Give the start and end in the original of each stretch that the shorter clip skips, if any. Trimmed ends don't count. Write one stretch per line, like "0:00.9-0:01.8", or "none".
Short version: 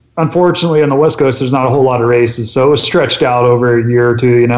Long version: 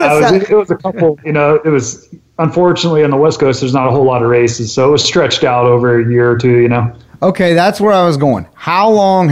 none

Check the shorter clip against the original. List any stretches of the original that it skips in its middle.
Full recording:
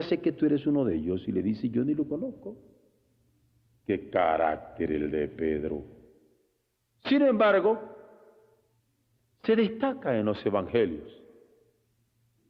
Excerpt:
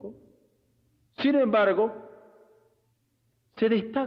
0:03.5-0:06.9

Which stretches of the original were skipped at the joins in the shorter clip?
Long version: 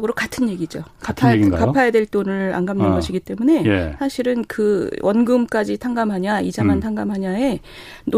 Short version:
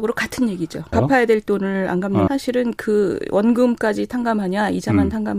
0:00.9-0:01.6
0:02.9-0:04.0

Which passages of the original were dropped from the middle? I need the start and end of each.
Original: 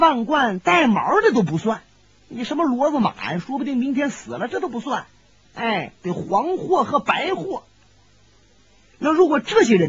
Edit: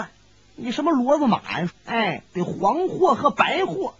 0:03.4-0:05.4

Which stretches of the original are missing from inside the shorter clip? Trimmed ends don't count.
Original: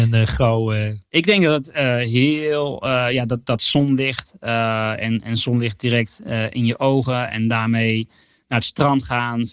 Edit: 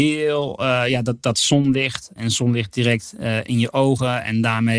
0:04.4-0:05.2

